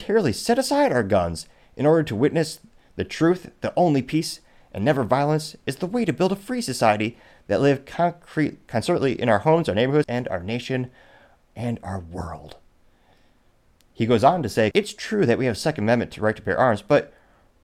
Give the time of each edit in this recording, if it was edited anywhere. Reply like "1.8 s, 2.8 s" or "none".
10.0 s, 14.7 s